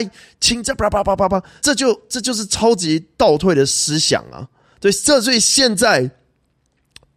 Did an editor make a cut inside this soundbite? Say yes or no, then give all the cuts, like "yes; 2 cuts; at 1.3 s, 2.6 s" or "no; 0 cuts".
yes; 1 cut; at 1.6 s